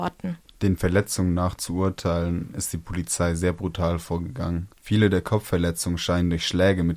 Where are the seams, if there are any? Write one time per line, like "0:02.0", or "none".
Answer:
none